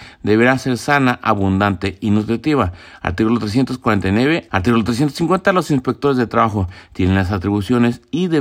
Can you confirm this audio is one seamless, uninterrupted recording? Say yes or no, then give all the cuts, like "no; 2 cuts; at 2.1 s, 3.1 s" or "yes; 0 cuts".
no; 1 cut; at 4.5 s